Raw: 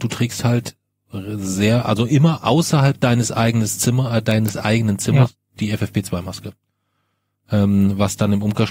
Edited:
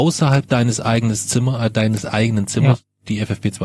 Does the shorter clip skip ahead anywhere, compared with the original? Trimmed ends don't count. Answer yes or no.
no